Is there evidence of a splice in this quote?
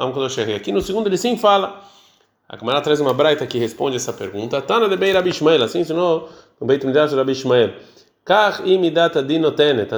no; 0 cuts

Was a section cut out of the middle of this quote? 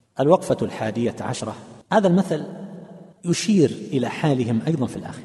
yes; 2 cuts; at 1.8 s, 3.1 s

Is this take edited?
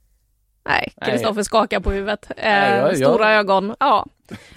no; 0 cuts

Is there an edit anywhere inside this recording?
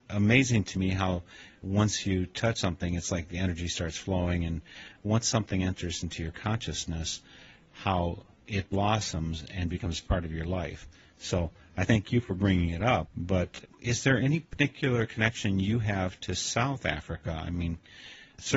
no; 0 cuts

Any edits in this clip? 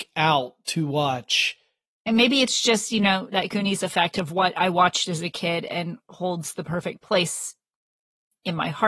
yes; 2 cuts; at 2.0 s, 3.3 s

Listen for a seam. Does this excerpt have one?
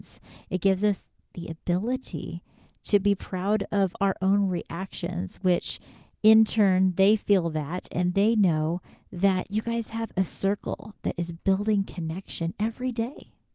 no; 0 cuts

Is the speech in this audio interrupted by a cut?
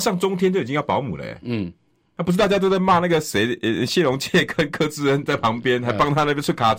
no; 0 cuts

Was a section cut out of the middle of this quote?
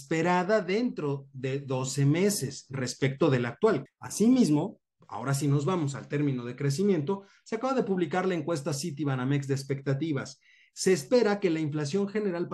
yes; 1 cut; at 3.9 s

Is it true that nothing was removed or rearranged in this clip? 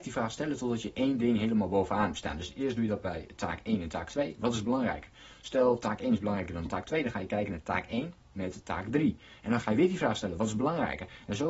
yes; 0 cuts

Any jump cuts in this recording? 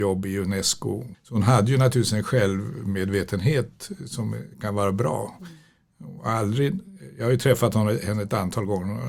yes; 1 cut; at 1.1 s

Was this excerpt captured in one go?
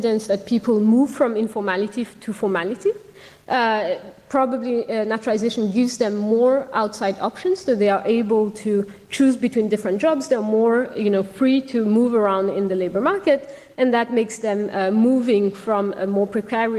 yes; 0 cuts

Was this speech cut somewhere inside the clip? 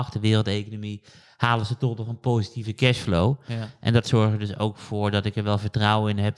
no; 0 cuts

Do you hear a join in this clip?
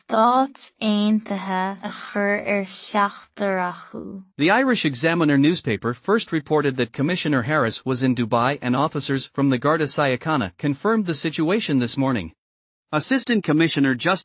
yes; 3 cuts; at 1.8 s, 4.3 s, 12.8 s

